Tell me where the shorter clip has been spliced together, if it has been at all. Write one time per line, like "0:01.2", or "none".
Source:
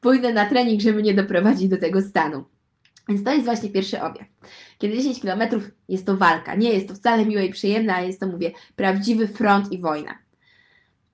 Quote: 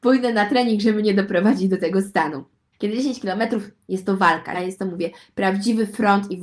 0:02.7
0:04.5